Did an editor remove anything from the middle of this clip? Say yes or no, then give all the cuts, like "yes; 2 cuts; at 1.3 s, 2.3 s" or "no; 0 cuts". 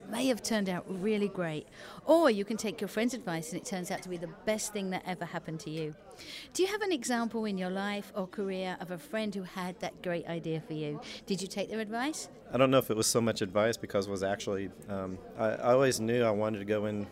yes; 2 cuts; at 12.4 s, 15.3 s